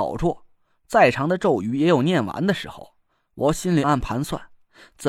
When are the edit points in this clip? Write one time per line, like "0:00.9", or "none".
0:03.8